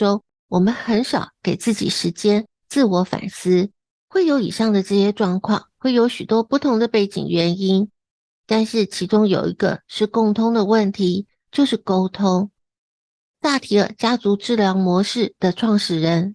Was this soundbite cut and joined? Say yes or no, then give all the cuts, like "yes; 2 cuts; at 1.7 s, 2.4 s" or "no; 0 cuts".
yes; 2 cuts; at 4.0 s, 5.8 s